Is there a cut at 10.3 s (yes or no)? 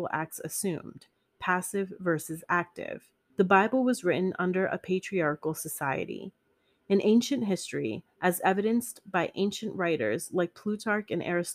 no